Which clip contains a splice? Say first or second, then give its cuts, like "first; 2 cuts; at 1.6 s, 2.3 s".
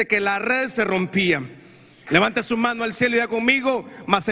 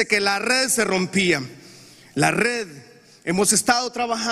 first; 1 cut; at 2.1 s